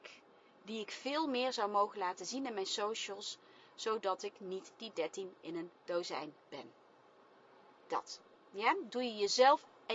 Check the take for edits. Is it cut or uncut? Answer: uncut